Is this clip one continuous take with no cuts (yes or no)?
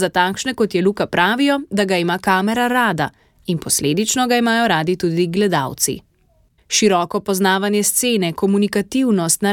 no